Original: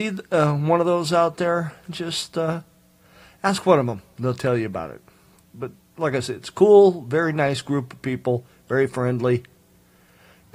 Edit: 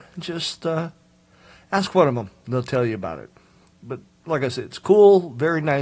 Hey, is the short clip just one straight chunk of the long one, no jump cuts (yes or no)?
yes